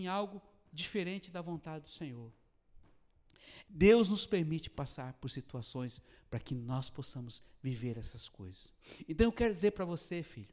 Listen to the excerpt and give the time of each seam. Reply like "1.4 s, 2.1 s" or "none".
3.6 s